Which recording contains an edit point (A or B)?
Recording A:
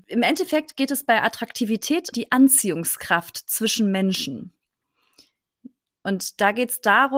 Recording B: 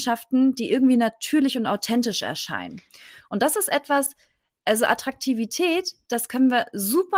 A